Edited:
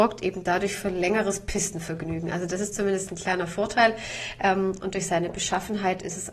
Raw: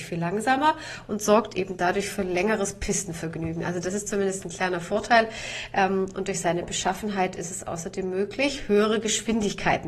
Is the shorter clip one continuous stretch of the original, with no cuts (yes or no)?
yes